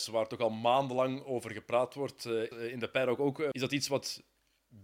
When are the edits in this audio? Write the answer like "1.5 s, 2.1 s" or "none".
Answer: 2.5 s, 3.5 s